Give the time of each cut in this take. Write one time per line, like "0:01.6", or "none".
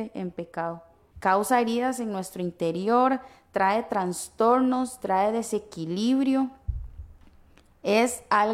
0:01.1